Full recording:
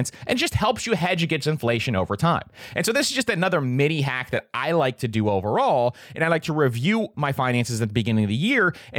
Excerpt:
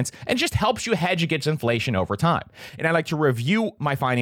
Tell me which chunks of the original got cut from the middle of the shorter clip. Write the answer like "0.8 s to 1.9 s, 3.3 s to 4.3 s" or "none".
2.7 s to 6.1 s